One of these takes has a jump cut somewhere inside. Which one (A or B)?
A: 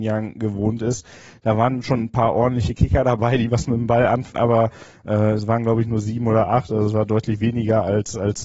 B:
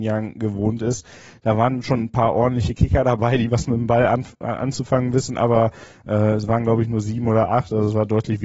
A